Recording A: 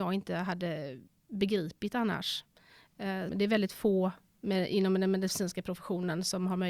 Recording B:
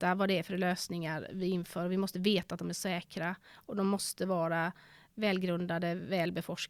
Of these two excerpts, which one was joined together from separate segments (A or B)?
A